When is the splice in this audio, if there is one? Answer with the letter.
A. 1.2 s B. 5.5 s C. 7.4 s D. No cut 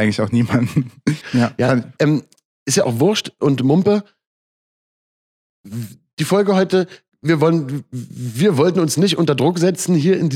A